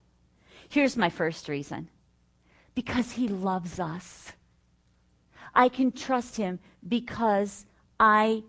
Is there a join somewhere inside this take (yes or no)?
no